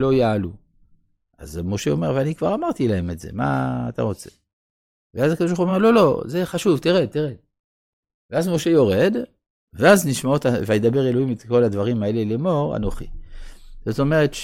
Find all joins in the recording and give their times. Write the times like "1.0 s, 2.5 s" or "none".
none